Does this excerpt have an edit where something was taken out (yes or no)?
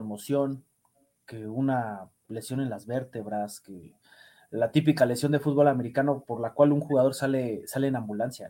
no